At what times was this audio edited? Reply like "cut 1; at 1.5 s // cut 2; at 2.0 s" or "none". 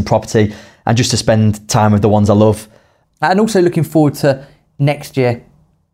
cut 1; at 3.0 s

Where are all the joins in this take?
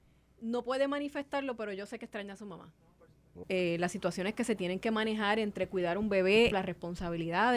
cut 1; at 3.4 s // cut 2; at 6.5 s

